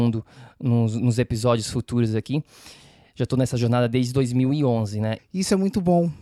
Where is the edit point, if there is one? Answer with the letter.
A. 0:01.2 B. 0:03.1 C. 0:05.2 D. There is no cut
C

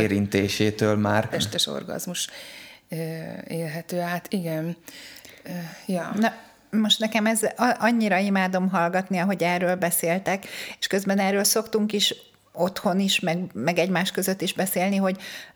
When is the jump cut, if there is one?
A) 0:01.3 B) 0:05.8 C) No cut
A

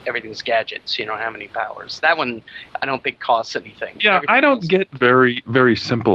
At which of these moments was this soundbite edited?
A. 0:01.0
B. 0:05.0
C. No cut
B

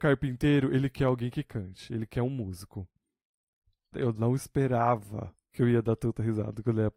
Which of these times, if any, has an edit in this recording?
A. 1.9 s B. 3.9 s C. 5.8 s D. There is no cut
B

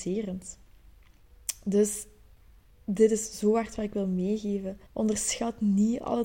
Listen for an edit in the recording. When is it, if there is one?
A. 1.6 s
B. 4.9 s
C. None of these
B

